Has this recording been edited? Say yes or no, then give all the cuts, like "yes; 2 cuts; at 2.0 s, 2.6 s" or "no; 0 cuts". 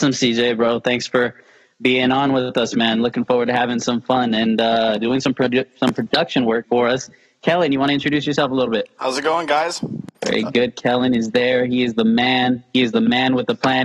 yes; 2 cuts; at 5.0 s, 6.6 s